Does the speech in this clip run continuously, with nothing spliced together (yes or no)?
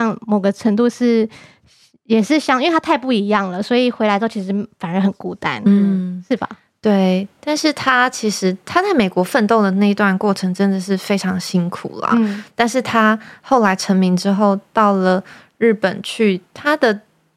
yes